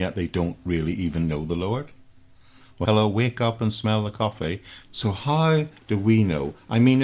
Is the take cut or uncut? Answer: cut